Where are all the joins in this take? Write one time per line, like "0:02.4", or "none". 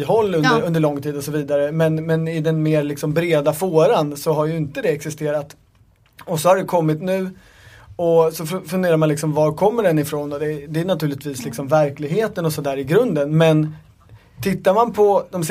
none